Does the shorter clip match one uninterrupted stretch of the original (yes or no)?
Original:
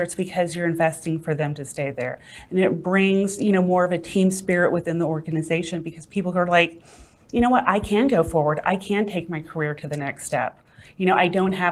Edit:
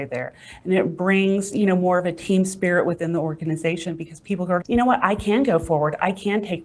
no